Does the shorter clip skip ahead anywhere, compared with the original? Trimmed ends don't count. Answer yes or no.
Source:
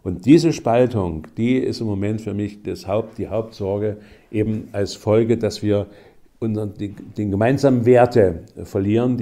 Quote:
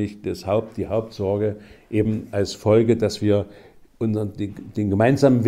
no